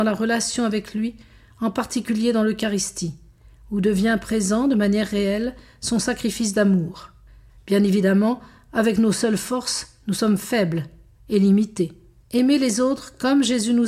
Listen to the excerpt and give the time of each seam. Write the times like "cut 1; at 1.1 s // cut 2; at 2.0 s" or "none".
cut 1; at 7.5 s // cut 2; at 12.2 s

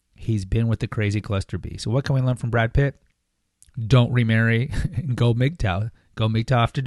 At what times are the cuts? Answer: none

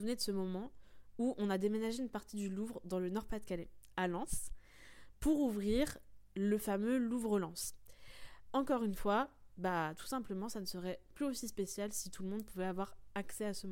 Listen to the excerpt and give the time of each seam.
cut 1; at 8.5 s

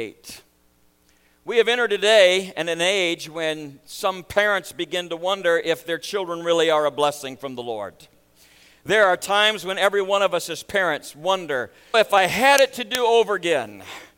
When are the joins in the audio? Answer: cut 1; at 11.9 s

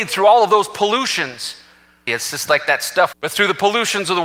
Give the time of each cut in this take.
cut 1; at 2.1 s // cut 2; at 3.1 s

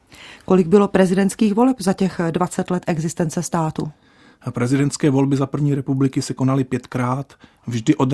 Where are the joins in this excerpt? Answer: none

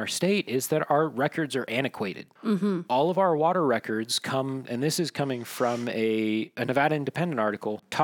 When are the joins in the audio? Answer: cut 1; at 2.9 s

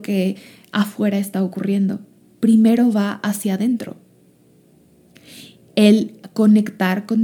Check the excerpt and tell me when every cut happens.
cut 1; at 5.7 s

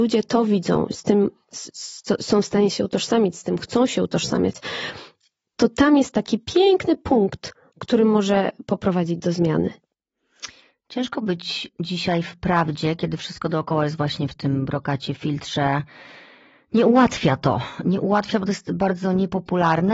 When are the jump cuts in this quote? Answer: none

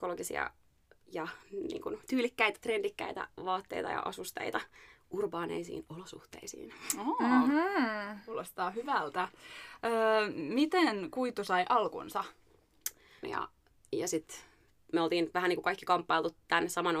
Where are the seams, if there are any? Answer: cut 1; at 13.2 s

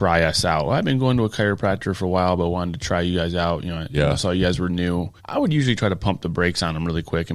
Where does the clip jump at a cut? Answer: cut 1; at 5.2 s

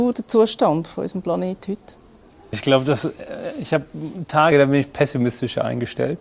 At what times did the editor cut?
cut 1; at 2.5 s // cut 2; at 4.5 s

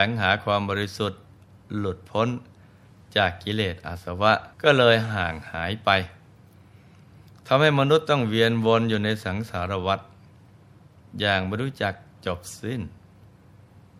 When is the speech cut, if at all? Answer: cut 1; at 4.5 s

